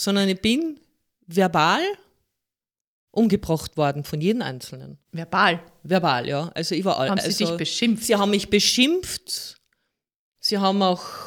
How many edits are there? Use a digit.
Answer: 1